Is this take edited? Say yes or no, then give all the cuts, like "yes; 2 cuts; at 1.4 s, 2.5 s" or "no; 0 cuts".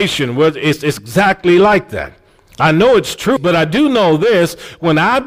yes; 1 cut; at 3.4 s